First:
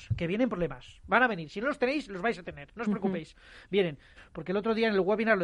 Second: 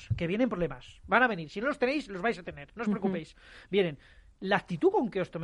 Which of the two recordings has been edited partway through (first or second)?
first